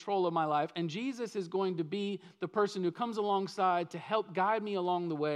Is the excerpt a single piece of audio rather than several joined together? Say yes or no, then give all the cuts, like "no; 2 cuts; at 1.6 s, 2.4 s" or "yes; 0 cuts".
yes; 0 cuts